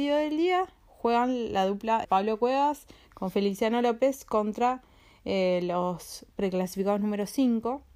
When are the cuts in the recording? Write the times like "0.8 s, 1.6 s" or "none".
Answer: 2.0 s